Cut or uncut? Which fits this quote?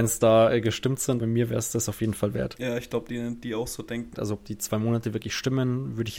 cut